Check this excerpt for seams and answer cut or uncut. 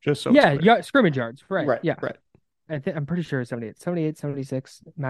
cut